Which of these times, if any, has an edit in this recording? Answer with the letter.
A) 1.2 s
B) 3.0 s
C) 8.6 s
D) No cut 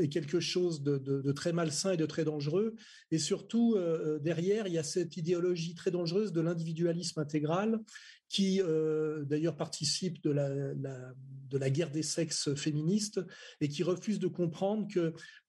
A